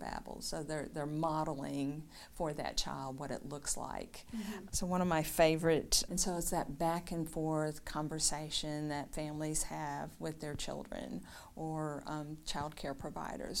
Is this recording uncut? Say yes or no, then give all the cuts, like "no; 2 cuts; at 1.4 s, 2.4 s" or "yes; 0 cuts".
no; 2 cuts; at 4.7 s, 6.1 s